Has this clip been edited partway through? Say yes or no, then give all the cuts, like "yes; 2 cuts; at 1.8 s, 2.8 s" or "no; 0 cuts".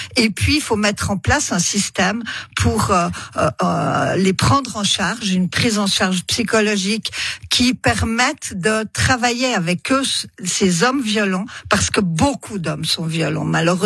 no; 0 cuts